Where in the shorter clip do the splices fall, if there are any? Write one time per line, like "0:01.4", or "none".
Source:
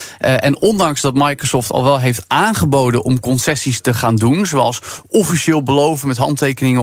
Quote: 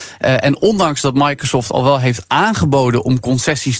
none